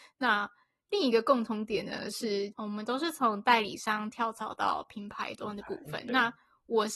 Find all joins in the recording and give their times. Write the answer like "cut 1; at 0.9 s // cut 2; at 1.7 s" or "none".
none

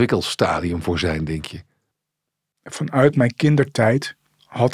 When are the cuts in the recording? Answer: none

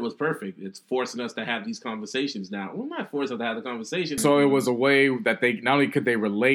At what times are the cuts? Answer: cut 1; at 4.2 s

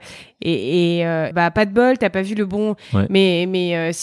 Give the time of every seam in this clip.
cut 1; at 1.3 s // cut 2; at 2.9 s

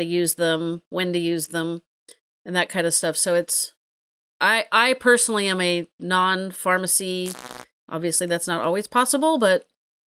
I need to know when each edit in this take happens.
cut 1; at 7.8 s

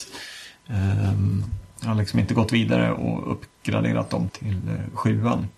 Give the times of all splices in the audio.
cut 1; at 4.3 s

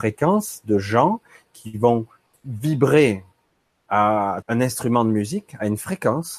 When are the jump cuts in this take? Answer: cut 1; at 2.3 s // cut 2; at 4.4 s

